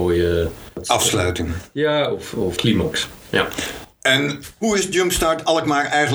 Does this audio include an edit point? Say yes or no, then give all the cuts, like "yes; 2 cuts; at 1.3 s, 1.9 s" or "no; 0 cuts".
no; 0 cuts